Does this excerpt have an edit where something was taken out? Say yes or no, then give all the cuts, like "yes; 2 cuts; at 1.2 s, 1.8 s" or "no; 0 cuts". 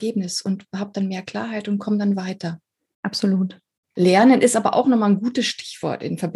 no; 0 cuts